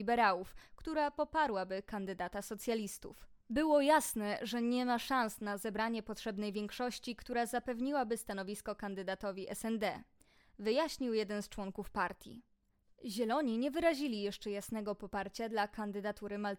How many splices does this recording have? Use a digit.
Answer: 2